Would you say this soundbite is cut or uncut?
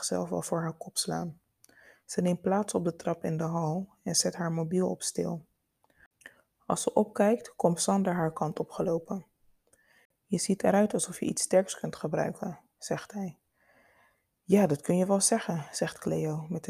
uncut